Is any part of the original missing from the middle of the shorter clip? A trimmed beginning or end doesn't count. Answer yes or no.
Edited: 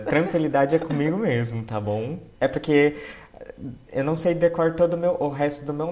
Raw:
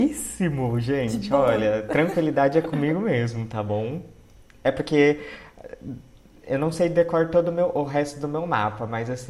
yes